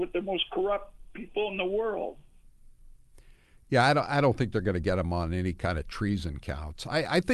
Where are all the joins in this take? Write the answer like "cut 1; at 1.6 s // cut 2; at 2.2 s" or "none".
none